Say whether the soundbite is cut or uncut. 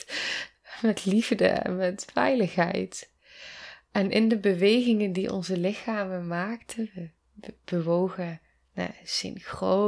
uncut